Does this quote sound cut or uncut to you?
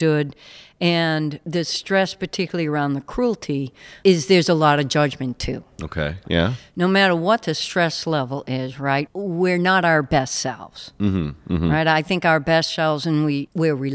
cut